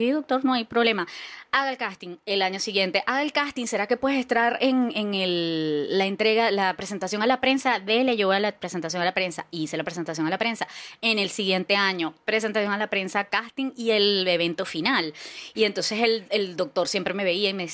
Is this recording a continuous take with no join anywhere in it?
no; 1 cut; at 15.5 s

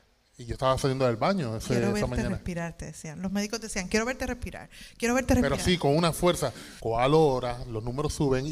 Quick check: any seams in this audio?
yes; 1 cut; at 6.8 s

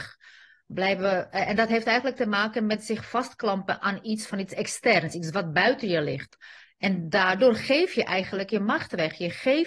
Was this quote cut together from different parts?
no; 0 cuts

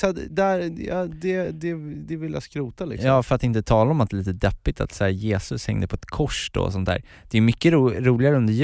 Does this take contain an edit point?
no; 0 cuts

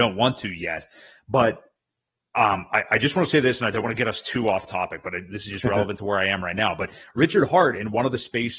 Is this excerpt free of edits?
yes; 0 cuts

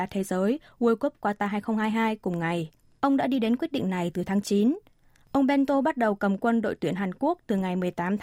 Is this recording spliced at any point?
yes; 1 cut; at 3.0 s

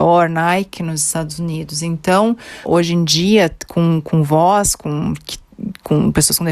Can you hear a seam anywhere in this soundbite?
yes; 1 cut; at 2.6 s

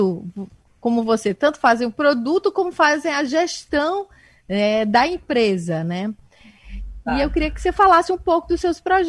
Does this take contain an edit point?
no; 0 cuts

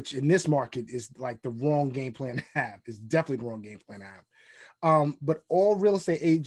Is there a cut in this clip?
no; 0 cuts

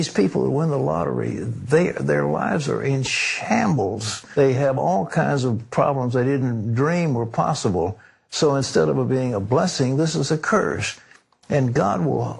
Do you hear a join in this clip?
no; 0 cuts

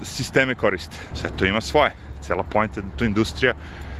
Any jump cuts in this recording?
yes; 1 cut; at 1.1 s

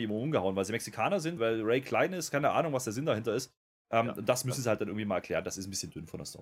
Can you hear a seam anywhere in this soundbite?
yes; 1 cut; at 1.4 s

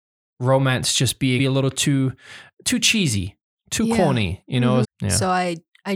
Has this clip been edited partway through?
yes; 2 cuts; at 1.4 s, 4.8 s

